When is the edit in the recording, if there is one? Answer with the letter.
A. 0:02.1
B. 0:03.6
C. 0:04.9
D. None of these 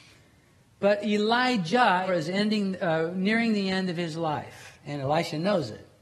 A